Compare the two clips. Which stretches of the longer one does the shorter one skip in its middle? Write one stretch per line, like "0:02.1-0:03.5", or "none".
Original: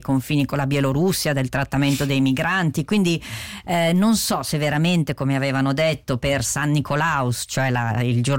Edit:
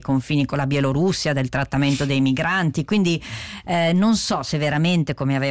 none